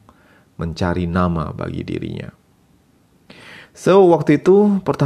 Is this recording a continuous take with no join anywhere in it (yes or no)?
yes